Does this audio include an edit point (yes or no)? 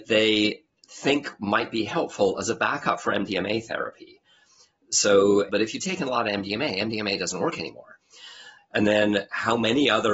yes